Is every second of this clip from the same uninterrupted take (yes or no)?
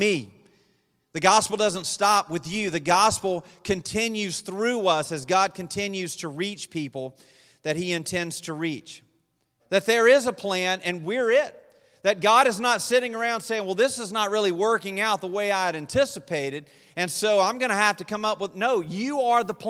no